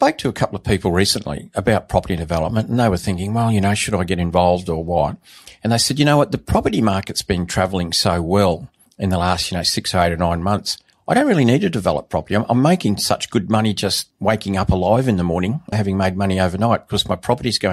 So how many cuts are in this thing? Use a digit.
1